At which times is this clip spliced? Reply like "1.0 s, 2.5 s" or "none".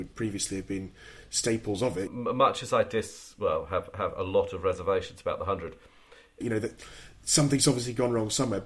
2.1 s, 6.4 s